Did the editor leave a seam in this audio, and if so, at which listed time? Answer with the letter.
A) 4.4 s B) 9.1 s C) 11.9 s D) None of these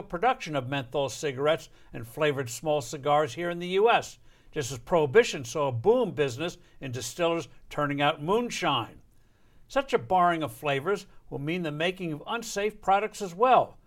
D